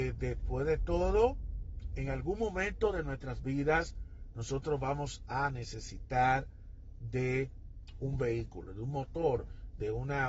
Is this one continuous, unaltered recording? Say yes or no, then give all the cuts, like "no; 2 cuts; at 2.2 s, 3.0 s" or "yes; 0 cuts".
no; 1 cut; at 8.7 s